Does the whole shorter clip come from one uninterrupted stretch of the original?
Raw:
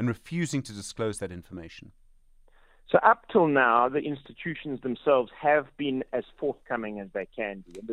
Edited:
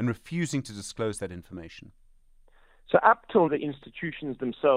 no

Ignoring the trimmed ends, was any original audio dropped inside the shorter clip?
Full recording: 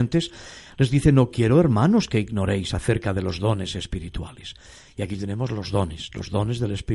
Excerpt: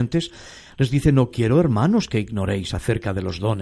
no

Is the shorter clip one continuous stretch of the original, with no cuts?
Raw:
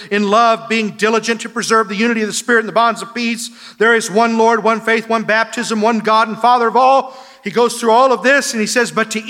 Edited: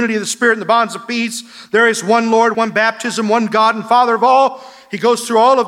no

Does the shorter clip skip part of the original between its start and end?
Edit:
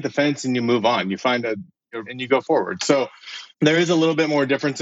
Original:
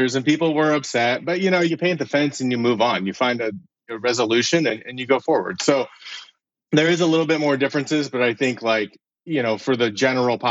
yes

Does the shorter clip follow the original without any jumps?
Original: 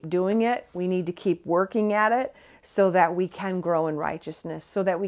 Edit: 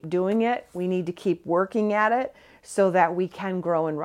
yes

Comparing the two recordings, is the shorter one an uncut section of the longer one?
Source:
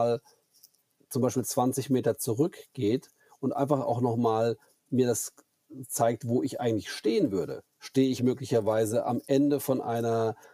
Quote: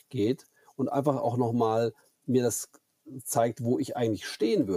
yes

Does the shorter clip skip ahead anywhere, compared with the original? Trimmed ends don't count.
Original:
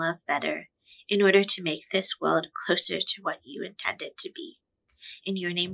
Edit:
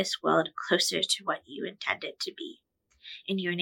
no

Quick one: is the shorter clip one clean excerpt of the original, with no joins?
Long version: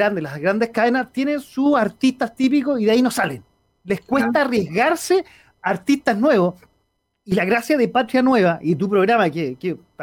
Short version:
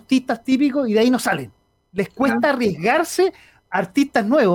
yes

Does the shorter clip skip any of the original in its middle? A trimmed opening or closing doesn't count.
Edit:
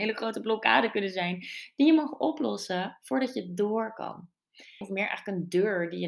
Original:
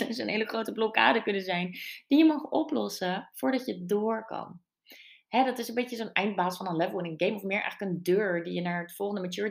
yes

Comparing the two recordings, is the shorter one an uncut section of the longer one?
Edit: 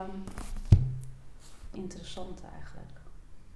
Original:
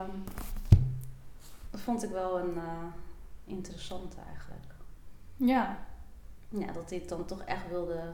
no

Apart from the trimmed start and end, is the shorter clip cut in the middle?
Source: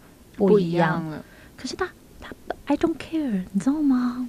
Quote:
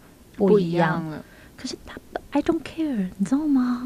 yes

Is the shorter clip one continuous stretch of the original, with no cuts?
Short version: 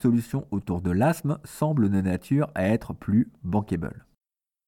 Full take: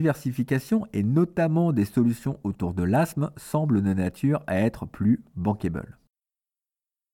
yes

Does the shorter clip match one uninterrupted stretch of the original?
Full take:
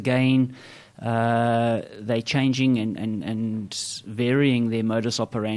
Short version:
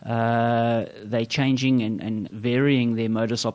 no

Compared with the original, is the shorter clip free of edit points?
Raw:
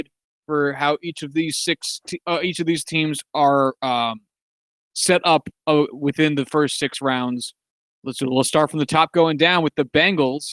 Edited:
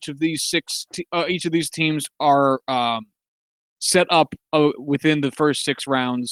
yes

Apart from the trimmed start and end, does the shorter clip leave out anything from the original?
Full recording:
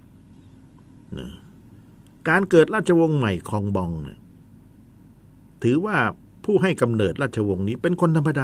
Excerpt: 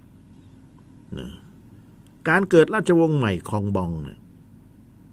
no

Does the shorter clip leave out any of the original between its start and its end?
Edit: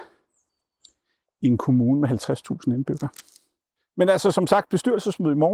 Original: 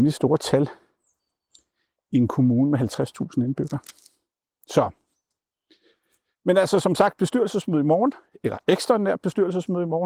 yes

